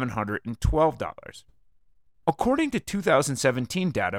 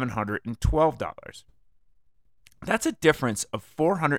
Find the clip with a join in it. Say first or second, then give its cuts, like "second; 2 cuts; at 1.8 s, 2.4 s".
first; 1 cut; at 2.2 s